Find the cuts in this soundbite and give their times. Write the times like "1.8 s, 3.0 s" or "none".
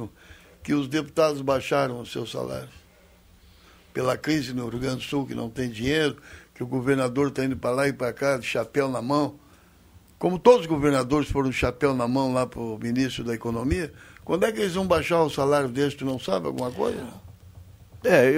none